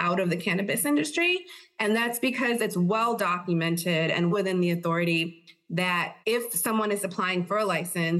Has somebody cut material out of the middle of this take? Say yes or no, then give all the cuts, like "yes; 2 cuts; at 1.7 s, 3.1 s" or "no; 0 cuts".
yes; 2 cuts; at 4.3 s, 6.2 s